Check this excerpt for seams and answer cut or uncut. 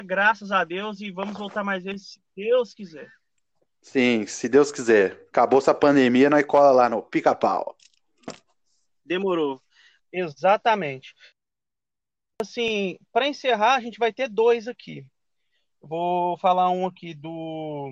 cut